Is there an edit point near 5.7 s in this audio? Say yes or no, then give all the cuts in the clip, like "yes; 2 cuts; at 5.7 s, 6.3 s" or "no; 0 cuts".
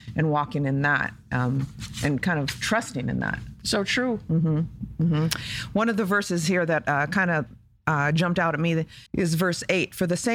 no; 1 cut; at 9.1 s